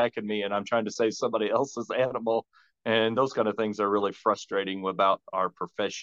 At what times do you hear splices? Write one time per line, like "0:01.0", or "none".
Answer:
none